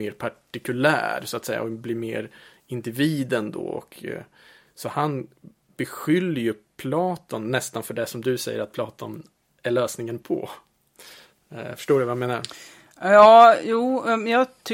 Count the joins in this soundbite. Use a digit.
0